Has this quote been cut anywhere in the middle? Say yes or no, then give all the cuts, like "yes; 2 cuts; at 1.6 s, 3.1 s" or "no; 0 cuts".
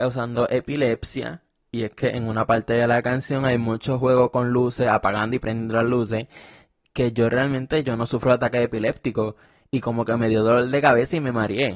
yes; 1 cut; at 7.8 s